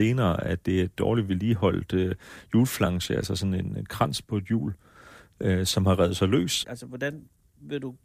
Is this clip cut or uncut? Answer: cut